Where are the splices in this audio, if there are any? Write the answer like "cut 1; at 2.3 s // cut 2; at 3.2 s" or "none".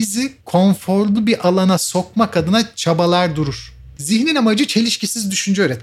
cut 1; at 4.0 s